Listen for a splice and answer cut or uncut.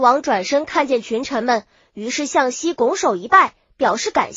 uncut